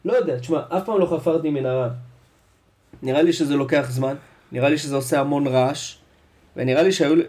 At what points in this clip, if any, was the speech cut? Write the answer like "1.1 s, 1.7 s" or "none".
none